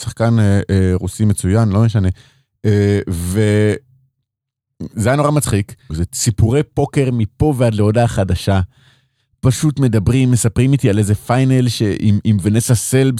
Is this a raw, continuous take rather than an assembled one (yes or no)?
no